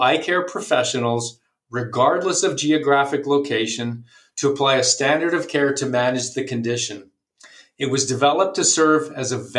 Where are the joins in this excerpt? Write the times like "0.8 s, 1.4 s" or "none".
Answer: none